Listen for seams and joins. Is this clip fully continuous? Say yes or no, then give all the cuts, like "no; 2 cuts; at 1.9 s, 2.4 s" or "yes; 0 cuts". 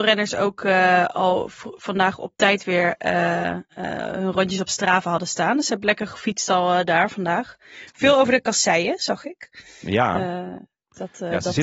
yes; 0 cuts